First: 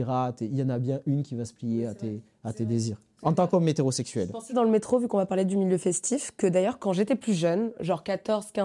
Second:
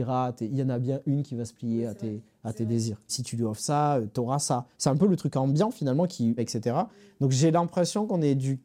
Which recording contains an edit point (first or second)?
second